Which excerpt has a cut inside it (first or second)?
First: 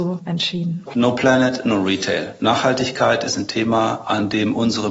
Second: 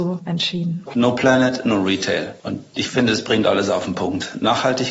first